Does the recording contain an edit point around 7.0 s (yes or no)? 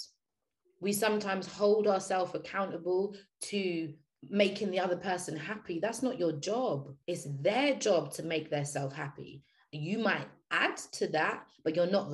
yes